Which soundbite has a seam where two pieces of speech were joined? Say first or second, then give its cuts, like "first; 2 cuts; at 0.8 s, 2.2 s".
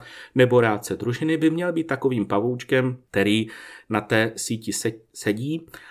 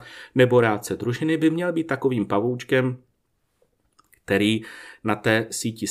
first; 1 cut; at 3.1 s